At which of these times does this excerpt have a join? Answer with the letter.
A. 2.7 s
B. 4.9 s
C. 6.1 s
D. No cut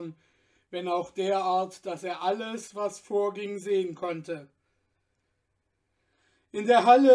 D